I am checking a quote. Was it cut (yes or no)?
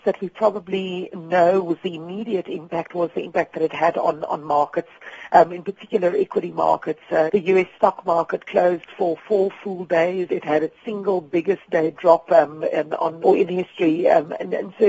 yes